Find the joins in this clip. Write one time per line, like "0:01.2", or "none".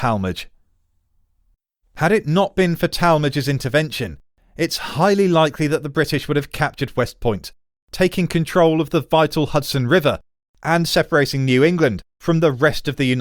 0:01.8